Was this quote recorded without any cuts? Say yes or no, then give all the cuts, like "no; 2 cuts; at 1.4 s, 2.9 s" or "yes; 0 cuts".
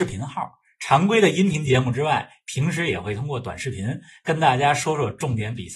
yes; 0 cuts